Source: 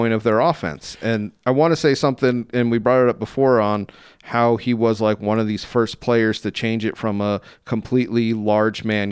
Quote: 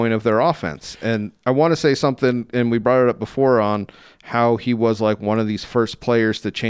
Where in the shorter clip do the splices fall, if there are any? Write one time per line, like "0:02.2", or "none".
none